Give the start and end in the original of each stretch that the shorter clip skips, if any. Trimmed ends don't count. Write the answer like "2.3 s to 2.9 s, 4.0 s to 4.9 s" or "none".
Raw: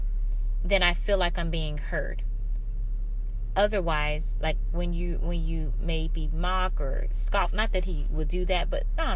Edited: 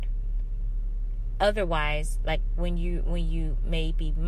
none